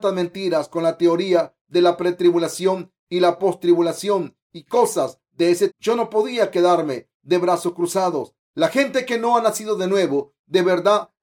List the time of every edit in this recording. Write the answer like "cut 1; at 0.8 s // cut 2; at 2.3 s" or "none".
cut 1; at 5.7 s // cut 2; at 8.4 s